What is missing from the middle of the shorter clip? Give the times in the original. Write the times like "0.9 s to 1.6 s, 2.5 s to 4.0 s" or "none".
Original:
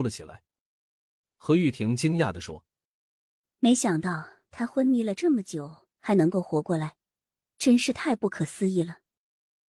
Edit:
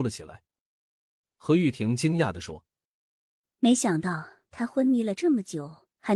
none

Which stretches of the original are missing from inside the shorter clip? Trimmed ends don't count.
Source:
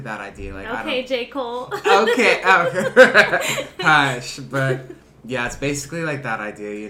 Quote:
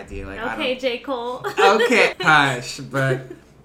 2.4 s to 3.7 s

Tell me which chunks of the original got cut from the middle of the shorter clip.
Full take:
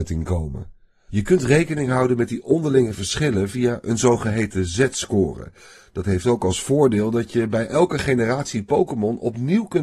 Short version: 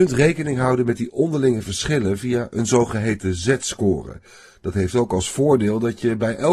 none

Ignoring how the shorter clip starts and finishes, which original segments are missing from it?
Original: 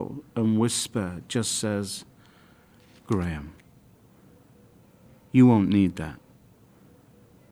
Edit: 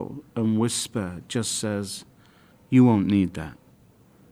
2.5 s to 5.1 s

